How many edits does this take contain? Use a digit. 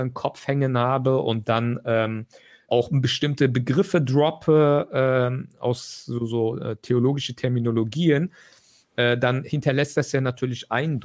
1